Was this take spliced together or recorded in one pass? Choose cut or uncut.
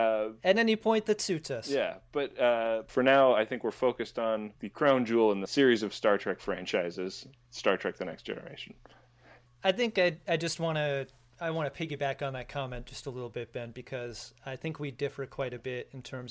uncut